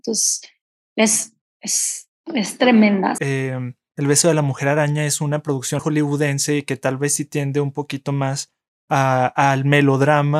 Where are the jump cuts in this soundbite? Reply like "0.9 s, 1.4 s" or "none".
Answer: 3.2 s, 5.8 s